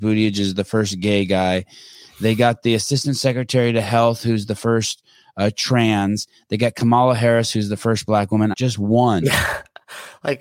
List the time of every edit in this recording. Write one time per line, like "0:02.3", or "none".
0:08.5